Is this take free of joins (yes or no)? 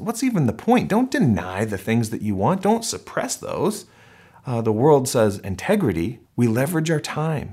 no